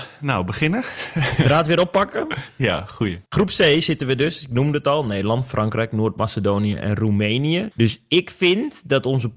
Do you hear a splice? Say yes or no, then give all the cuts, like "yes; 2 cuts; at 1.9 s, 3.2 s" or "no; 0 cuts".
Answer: yes; 2 cuts; at 3.3 s, 7.7 s